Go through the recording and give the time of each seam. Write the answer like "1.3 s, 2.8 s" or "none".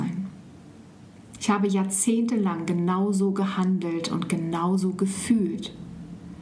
1.4 s